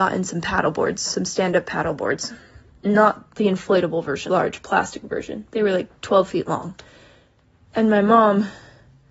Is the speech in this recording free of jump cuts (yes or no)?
no